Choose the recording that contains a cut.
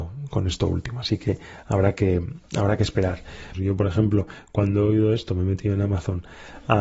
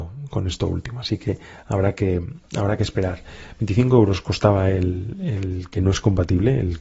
first; 1 cut; at 3.5 s

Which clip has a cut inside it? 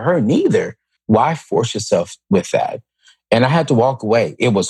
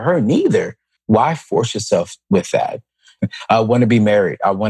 second; 1 cut; at 3.2 s

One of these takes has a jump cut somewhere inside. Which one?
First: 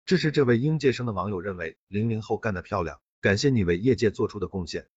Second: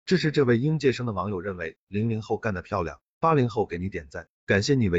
first; 1 cut; at 3.1 s

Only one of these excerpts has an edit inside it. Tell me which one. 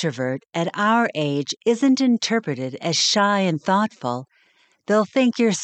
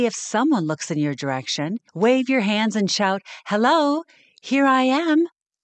second; 1 cut; at 1.9 s

